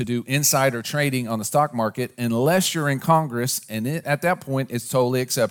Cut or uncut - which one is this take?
cut